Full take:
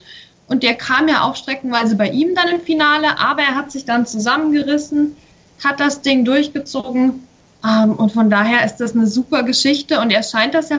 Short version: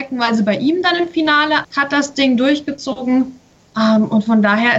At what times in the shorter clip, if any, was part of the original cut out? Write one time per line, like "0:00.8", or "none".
0:01.6